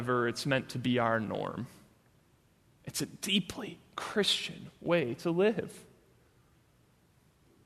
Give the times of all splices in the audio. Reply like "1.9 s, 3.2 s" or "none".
none